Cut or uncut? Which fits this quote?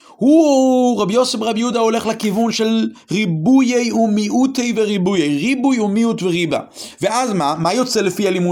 uncut